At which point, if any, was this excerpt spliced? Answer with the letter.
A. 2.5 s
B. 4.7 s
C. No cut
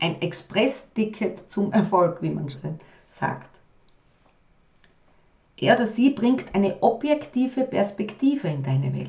A